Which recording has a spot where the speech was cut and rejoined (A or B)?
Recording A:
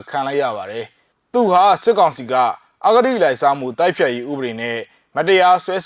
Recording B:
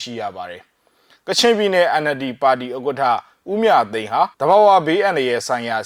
B